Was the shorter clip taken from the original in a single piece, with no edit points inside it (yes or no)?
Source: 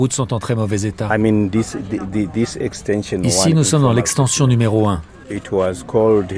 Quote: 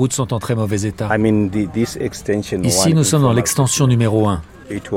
no